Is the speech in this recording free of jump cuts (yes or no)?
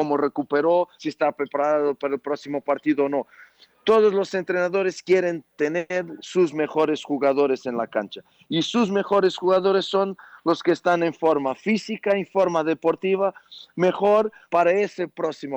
yes